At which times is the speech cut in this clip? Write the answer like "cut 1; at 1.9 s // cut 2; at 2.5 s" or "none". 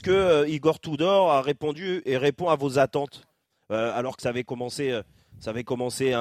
none

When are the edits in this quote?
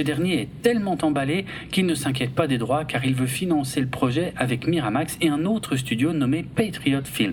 none

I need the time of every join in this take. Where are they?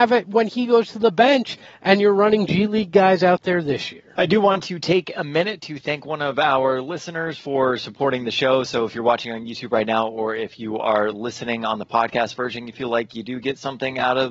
cut 1; at 4.1 s

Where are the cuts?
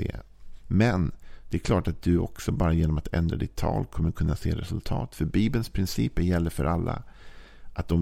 none

